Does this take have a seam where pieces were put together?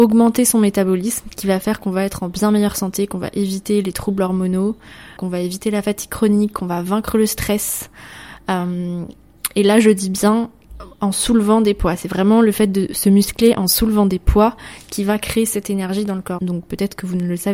yes; 2 cuts; at 5.2 s, 16.4 s

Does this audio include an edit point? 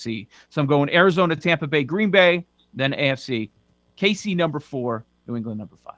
no; 0 cuts

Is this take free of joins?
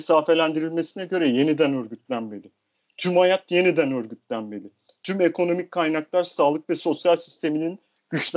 yes; 0 cuts

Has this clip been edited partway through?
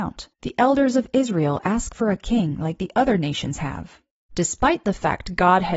no; 0 cuts

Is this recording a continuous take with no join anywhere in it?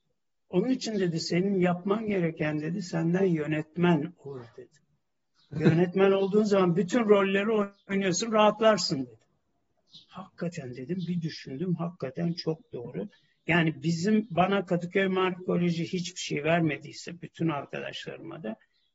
yes; 0 cuts

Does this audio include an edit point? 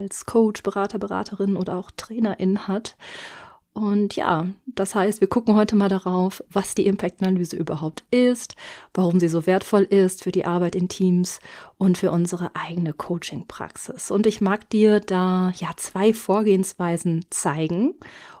no; 0 cuts

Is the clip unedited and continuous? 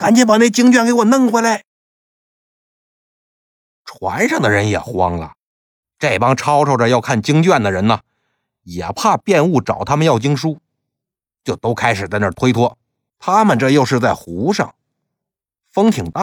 no; 2 cuts; at 5.8 s, 13.1 s

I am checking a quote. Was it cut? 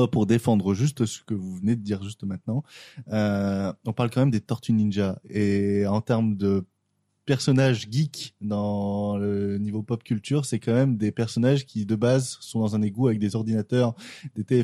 no; 0 cuts

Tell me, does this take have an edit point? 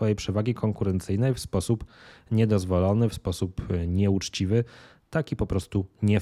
no; 0 cuts

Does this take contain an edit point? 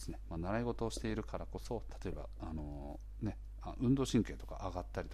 no; 0 cuts

